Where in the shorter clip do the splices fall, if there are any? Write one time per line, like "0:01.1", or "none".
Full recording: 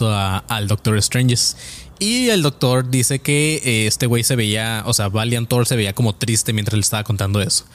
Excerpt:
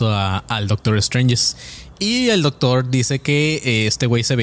none